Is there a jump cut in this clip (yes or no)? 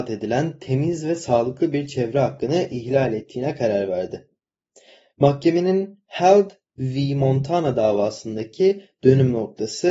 no